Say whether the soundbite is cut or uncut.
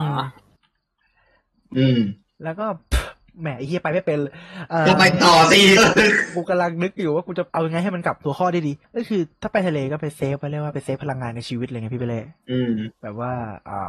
cut